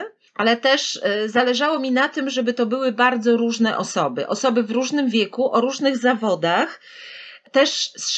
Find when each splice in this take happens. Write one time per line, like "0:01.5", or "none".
none